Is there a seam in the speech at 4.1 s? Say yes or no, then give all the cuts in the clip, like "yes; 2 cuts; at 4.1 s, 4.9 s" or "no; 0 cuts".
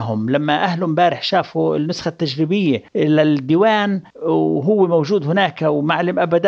yes; 2 cuts; at 2.9 s, 4.1 s